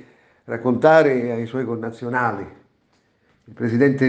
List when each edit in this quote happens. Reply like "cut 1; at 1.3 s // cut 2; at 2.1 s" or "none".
none